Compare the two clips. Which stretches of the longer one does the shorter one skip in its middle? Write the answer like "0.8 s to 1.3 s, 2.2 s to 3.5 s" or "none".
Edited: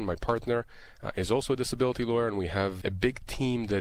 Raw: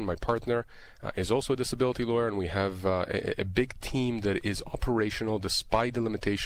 2.8 s to 3.4 s